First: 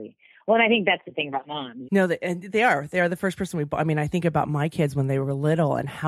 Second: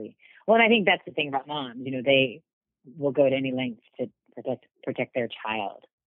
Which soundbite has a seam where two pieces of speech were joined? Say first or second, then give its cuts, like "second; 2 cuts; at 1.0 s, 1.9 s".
first; 1 cut; at 1.8 s